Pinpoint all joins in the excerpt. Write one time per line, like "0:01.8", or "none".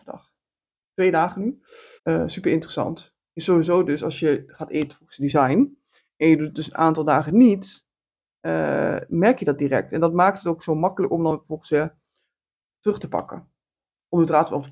0:02.0